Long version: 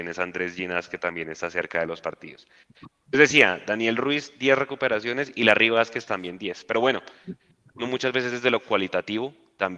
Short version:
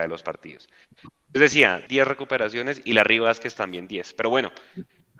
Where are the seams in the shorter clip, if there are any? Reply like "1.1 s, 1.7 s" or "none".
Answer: 1.9 s